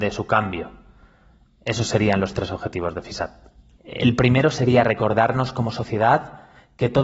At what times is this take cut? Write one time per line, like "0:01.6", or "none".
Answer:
0:03.8